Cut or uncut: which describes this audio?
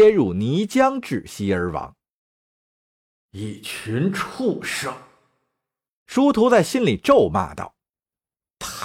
uncut